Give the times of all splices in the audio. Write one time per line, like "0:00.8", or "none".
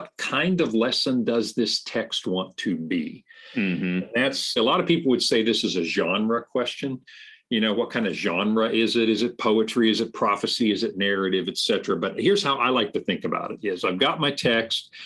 0:04.6